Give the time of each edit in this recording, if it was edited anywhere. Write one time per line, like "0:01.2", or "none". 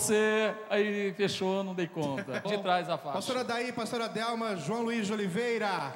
0:02.4